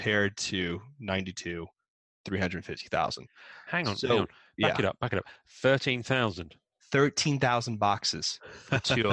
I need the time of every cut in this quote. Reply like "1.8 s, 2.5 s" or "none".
none